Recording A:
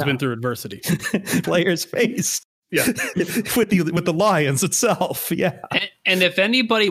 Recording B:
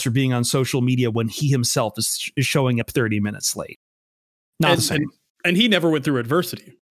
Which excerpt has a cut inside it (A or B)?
A